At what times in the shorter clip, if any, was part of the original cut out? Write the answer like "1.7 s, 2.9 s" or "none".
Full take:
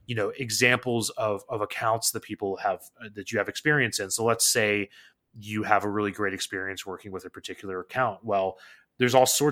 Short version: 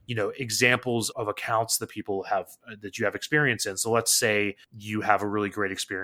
1.1 s, 4.6 s